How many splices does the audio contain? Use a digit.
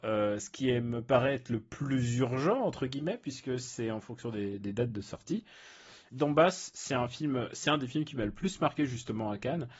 1